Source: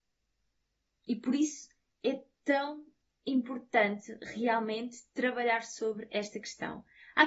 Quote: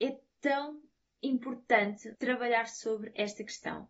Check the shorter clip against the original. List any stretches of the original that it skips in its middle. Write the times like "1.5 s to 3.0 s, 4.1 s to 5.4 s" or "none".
4.2 s to 5.1 s